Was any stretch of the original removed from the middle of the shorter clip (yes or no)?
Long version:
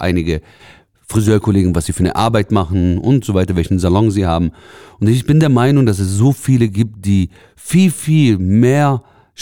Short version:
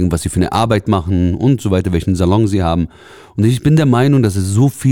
no